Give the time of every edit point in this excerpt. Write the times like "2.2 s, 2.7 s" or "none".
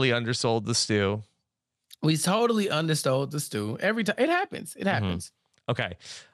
none